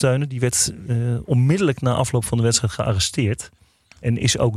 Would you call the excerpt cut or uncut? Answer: uncut